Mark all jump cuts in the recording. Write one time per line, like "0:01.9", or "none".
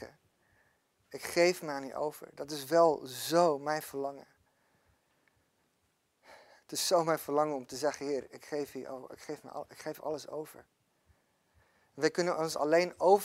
none